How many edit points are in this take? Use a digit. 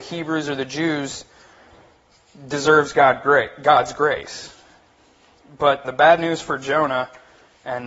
1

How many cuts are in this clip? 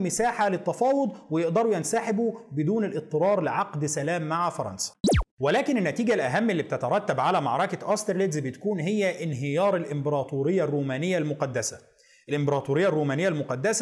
1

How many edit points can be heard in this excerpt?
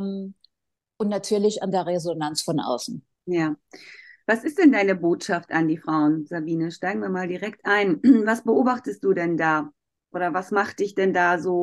1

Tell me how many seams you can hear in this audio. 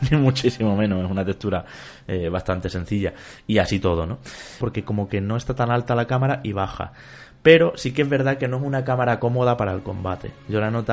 1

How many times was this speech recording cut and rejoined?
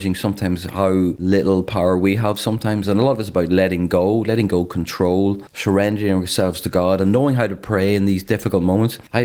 0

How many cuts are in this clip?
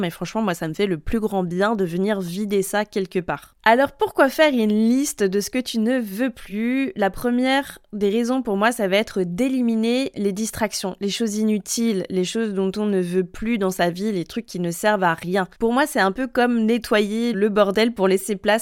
2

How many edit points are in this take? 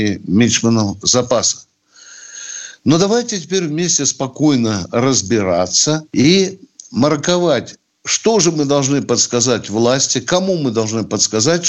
1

